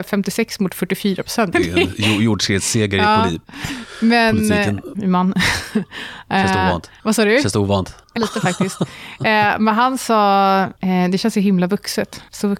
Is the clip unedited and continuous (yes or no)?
no